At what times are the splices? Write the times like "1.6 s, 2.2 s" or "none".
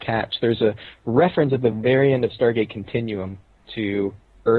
none